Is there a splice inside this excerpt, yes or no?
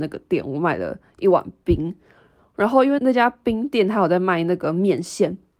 yes